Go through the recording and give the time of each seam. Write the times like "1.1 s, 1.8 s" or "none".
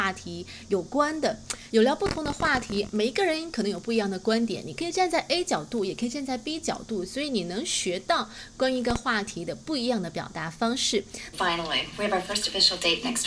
1.7 s, 2.9 s, 11.3 s